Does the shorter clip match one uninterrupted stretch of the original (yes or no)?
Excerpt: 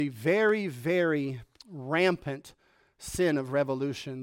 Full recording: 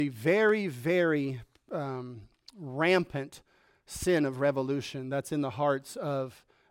no